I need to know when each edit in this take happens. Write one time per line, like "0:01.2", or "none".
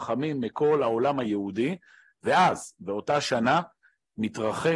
none